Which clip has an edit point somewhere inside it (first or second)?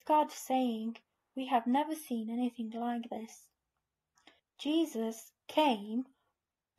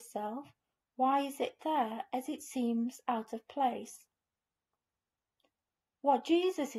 first